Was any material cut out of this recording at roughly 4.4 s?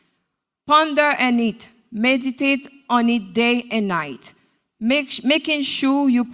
no; 0 cuts

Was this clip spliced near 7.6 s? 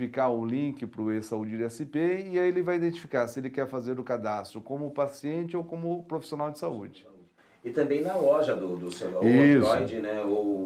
no; 0 cuts

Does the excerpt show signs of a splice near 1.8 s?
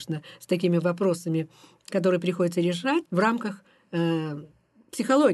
no; 1 cut; at 3.1 s

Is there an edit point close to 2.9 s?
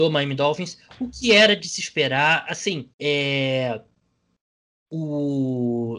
yes; 1 cut; at 2.9 s

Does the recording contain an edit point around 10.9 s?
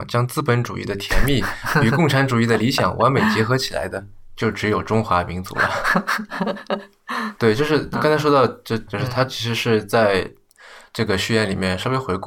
no; 2 cuts; at 7.4 s, 8.9 s

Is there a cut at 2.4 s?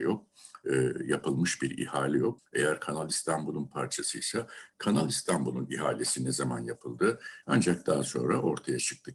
yes; 2 cuts; at 2.4 s, 7.4 s

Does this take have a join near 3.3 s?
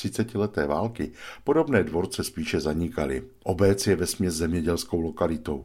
no; 0 cuts

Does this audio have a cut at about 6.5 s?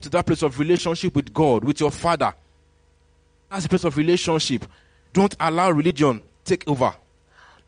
no; 2 cuts; at 3.4 s, 5.1 s

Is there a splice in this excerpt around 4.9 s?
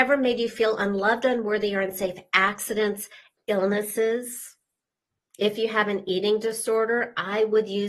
no; 0 cuts

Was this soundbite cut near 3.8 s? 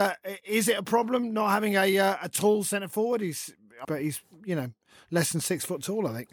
yes; 1 cut; at 3.8 s

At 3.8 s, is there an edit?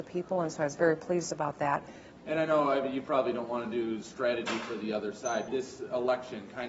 no; 2 cuts; at 2.2 s, 5.5 s

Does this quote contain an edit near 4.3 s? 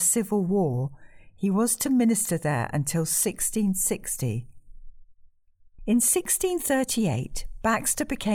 no; 1 cut; at 5.8 s

